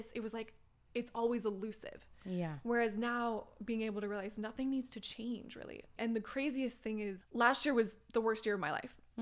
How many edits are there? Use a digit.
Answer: 2